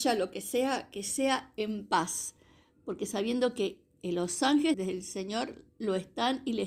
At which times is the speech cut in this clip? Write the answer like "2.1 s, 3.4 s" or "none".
4.7 s